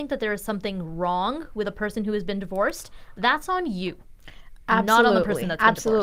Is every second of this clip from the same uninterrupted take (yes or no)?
yes